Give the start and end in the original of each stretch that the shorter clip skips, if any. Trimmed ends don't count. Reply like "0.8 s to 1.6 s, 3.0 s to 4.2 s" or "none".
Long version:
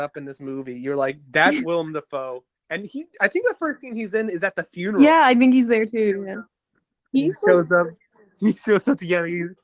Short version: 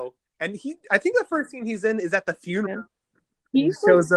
4.9 s to 6.2 s